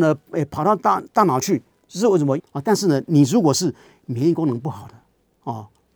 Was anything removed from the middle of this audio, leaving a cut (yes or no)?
yes